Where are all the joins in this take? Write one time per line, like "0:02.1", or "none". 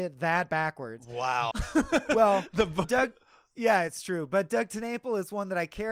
0:01.5
0:02.8